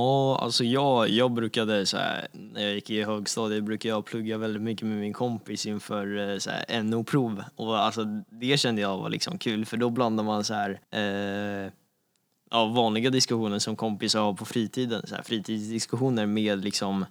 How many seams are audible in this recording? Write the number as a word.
one